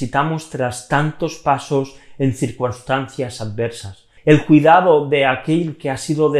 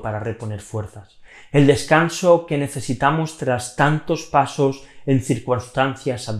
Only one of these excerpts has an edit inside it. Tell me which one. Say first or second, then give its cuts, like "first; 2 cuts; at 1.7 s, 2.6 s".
first; 1 cut; at 4.2 s